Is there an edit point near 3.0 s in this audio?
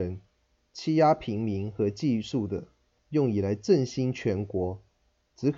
yes; 1 cut; at 3.0 s

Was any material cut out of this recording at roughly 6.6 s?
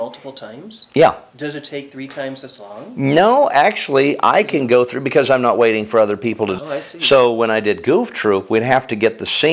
yes; 1 cut; at 6.6 s

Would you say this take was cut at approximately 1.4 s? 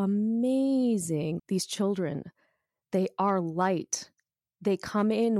yes; 1 cut; at 1.4 s

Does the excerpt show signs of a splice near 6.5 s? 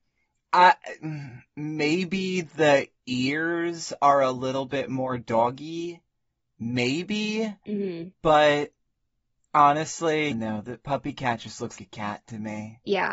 no; 2 cuts; at 10.3 s, 11.8 s

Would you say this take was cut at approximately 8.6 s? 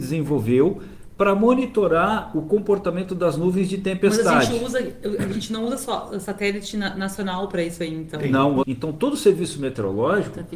yes; 1 cut; at 8.6 s

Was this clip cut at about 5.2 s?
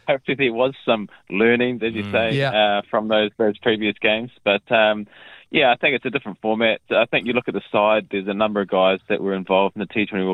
no; 0 cuts

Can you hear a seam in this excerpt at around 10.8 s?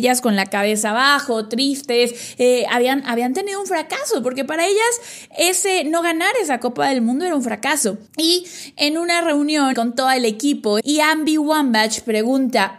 yes; 3 cuts; at 8.1 s, 9.7 s, 10.8 s

